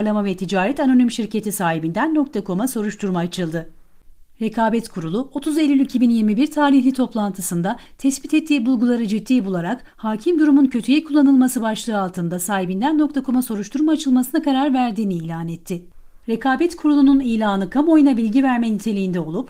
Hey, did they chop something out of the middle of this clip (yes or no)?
no